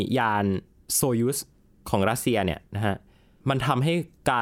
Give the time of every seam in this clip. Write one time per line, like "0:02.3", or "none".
none

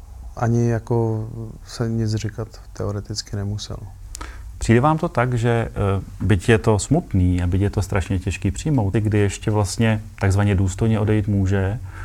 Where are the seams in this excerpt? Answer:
0:04.5
0:08.9

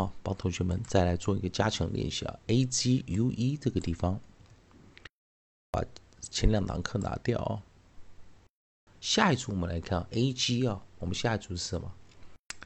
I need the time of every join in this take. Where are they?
0:08.9

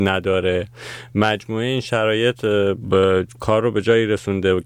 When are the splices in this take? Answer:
0:02.8

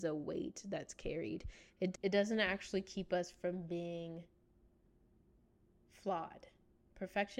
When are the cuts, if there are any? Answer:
none

